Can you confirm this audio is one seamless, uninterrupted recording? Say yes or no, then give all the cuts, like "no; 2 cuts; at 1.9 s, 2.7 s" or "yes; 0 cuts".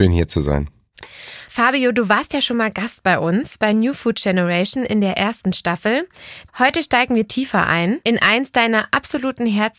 no; 1 cut; at 6.5 s